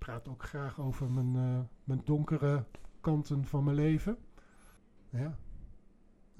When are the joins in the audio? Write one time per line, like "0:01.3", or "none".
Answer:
0:05.0

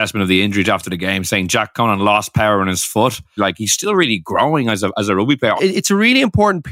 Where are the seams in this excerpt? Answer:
0:03.4
0:05.6

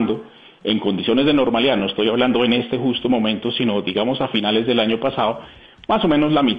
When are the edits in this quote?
none

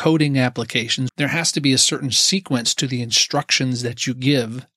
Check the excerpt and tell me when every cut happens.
0:01.1

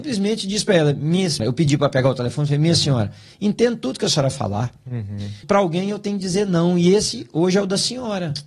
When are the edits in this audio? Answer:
0:01.4
0:05.4

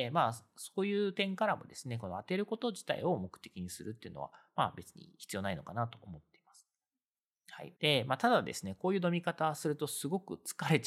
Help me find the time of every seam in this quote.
0:07.7

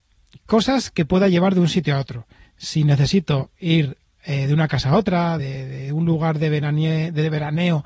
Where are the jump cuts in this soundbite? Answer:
0:05.4

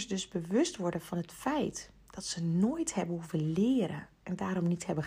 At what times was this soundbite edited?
none

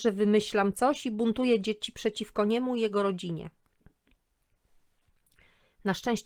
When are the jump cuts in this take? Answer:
none

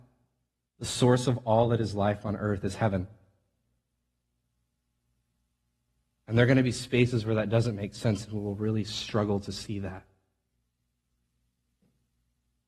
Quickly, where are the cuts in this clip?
none

